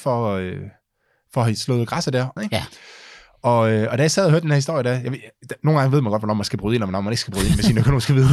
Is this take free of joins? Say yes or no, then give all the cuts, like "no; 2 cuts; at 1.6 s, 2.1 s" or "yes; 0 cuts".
no; 1 cut; at 2.4 s